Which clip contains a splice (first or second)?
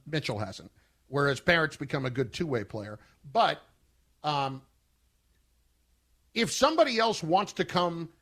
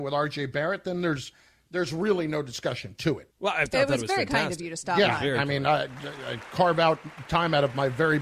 second